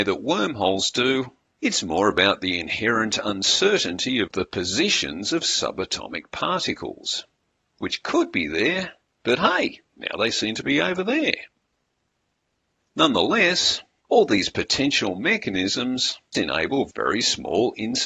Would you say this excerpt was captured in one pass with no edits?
no; 1 cut; at 16.3 s

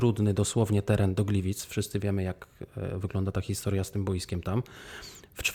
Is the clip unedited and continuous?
yes; 0 cuts

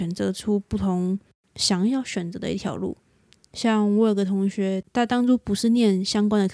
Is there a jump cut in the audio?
no; 0 cuts

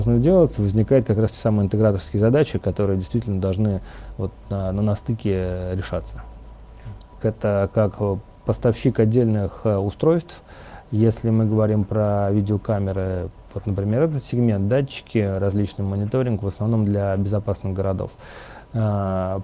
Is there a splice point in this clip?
yes; 1 cut; at 7.2 s

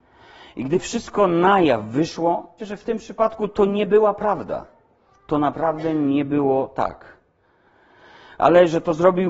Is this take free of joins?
no; 1 cut; at 2.6 s

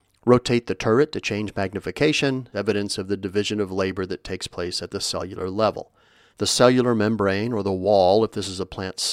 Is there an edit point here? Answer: yes; 2 cuts; at 2.5 s, 6.3 s

